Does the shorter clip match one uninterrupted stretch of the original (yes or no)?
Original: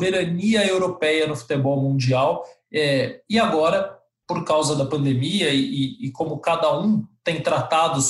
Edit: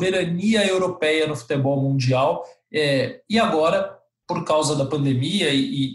yes